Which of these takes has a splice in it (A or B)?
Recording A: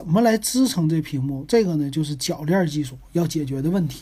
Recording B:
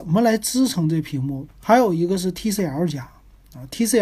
B